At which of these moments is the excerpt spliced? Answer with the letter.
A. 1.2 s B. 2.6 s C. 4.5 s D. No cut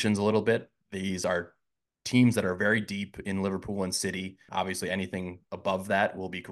C